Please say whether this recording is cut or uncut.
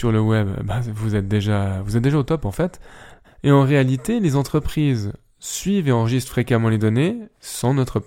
cut